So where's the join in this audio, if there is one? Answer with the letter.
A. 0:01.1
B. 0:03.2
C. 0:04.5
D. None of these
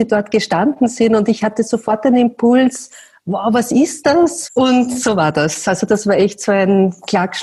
C